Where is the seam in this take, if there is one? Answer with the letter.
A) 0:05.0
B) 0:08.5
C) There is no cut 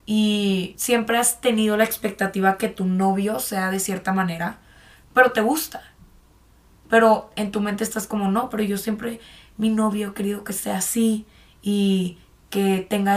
A